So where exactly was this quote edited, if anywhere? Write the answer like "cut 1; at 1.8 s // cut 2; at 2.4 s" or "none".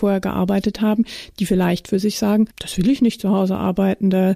cut 1; at 2.5 s